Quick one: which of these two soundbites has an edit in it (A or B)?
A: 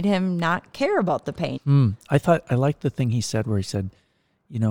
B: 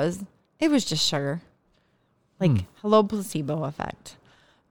A